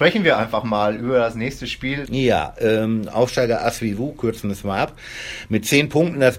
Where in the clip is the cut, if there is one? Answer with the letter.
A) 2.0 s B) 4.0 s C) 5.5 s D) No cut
A